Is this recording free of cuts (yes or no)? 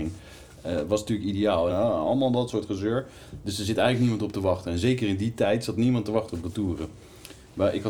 no